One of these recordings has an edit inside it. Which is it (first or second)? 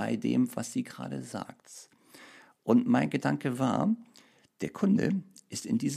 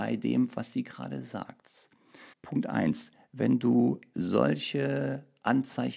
second